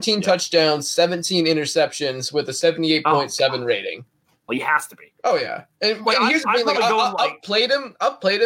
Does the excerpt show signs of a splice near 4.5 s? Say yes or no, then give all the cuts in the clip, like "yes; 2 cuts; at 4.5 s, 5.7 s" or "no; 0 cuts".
yes; 1 cut; at 4.5 s